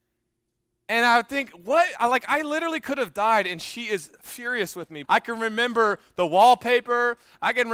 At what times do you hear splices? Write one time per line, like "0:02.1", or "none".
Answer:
0:05.0